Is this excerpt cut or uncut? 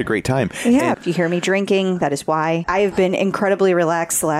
cut